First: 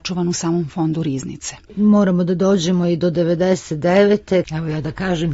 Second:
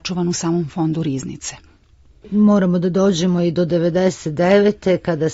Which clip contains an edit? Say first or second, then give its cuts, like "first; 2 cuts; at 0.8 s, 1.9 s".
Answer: first; 2 cuts; at 1.7 s, 4.4 s